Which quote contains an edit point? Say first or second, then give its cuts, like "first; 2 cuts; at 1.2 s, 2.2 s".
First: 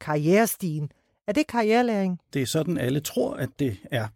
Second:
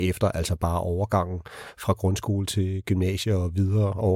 first; 1 cut; at 2.3 s